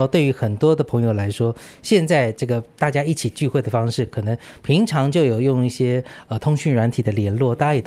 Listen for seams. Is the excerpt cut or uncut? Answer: uncut